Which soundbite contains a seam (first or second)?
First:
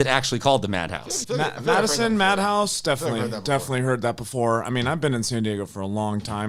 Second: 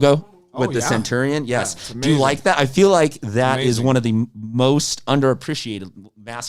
first